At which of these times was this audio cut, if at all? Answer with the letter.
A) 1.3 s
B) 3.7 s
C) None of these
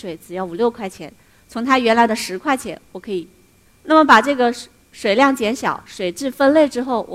B